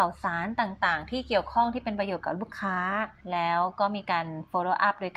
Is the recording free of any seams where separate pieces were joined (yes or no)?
no